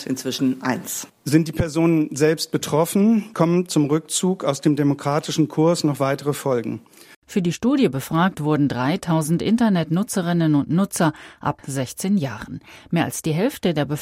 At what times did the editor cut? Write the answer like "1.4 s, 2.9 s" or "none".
1.1 s, 7.1 s